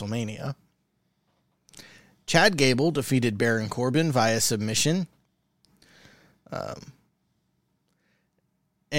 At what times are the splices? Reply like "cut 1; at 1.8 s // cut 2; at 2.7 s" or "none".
none